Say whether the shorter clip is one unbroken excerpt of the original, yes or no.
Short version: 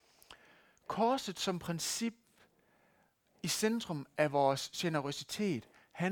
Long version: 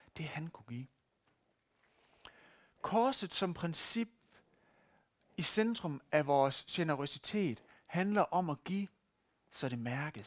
yes